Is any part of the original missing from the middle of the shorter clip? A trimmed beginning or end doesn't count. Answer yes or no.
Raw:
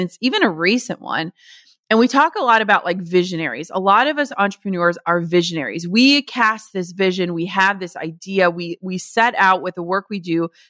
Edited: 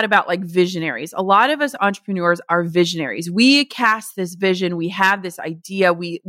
no